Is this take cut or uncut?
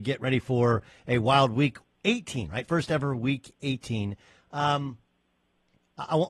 uncut